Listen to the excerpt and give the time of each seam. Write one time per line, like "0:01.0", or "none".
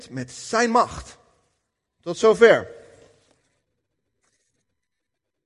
0:01.9